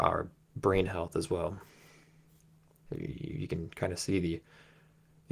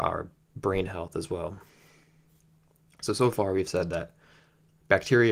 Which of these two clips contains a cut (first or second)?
first